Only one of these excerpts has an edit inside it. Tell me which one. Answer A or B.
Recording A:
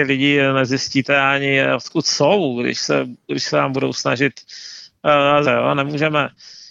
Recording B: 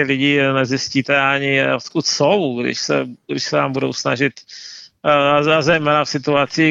A